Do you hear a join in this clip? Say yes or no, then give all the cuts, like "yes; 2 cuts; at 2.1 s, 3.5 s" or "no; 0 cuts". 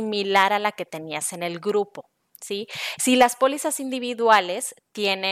no; 0 cuts